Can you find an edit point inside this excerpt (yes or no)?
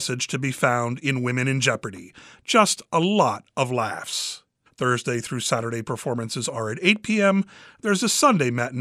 yes